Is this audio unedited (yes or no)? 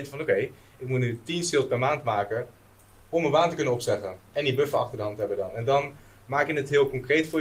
yes